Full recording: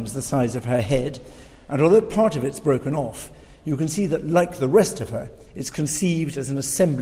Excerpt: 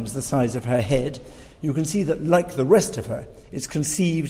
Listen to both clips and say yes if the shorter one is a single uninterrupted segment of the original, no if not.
no